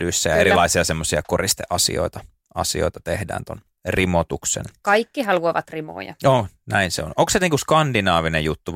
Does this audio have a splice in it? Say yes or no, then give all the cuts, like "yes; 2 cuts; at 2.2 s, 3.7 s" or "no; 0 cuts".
no; 0 cuts